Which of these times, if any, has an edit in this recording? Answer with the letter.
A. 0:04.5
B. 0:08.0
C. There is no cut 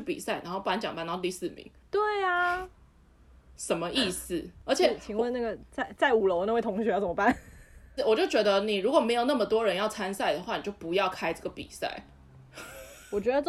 B